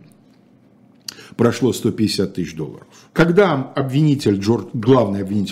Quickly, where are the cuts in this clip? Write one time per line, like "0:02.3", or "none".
0:03.1